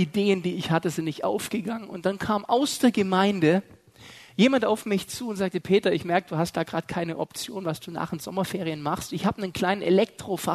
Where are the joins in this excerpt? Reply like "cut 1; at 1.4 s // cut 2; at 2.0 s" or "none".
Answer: none